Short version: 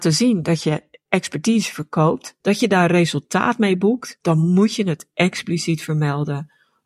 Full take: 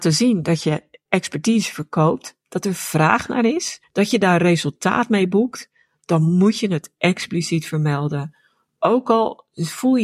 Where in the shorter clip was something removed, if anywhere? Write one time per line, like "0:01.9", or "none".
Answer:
0:02.4
0:04.2